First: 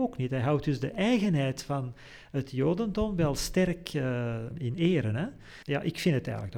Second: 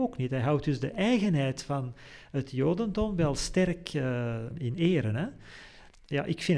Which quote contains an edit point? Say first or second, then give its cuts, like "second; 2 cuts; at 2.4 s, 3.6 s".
first; 1 cut; at 5.6 s